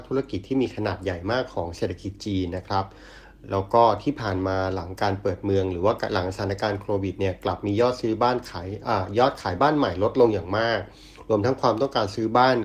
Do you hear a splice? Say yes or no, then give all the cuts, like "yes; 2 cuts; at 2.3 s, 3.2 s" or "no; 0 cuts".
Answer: no; 0 cuts